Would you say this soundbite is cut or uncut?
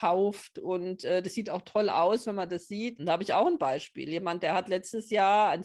cut